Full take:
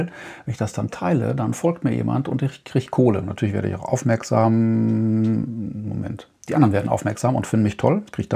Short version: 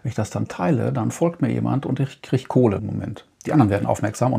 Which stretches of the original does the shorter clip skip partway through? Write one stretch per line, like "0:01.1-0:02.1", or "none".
0:03.2-0:05.8